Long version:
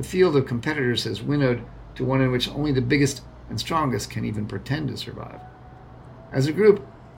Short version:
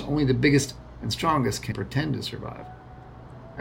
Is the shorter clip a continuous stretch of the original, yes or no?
no